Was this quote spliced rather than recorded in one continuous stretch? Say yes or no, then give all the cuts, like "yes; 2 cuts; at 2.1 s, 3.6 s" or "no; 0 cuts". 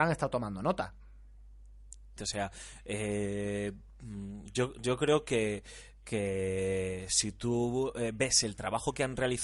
yes; 1 cut; at 2.2 s